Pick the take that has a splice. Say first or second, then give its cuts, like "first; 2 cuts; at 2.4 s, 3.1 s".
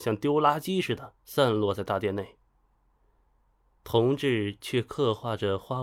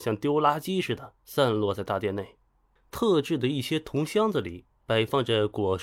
second; 1 cut; at 2.8 s